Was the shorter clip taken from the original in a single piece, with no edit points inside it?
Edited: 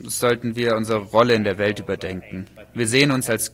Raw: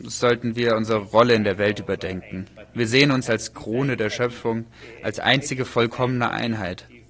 yes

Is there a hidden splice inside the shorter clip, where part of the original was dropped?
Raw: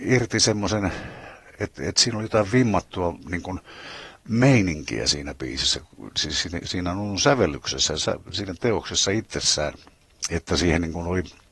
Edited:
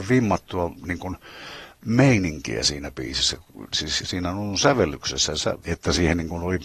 yes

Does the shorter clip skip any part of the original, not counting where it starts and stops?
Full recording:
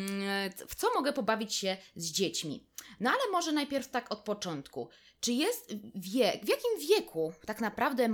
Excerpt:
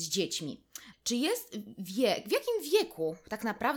yes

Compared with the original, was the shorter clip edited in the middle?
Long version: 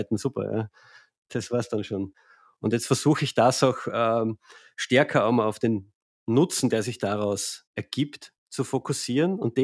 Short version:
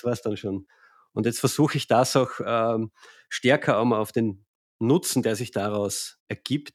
no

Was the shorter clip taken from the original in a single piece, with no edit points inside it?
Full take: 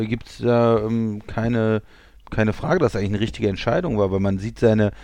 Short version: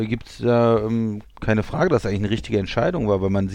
no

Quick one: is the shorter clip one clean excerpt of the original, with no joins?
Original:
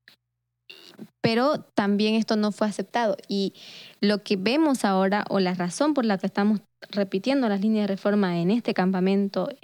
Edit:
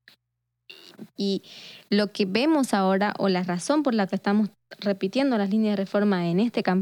no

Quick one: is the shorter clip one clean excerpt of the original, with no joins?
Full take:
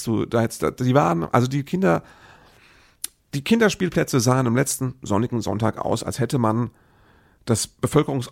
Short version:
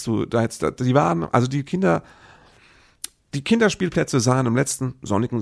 yes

